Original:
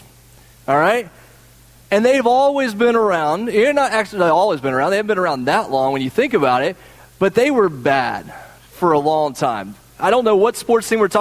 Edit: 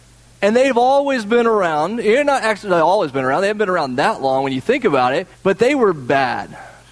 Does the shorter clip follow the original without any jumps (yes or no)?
no